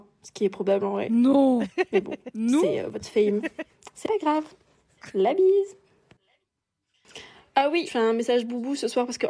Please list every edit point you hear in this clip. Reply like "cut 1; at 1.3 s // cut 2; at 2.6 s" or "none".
cut 1; at 7.9 s